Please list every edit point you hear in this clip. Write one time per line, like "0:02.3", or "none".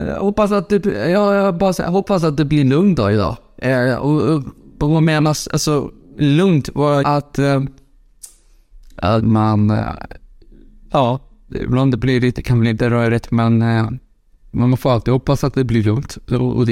0:07.0
0:09.2